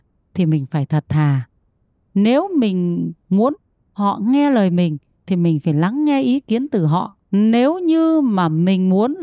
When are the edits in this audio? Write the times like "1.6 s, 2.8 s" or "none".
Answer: 7.2 s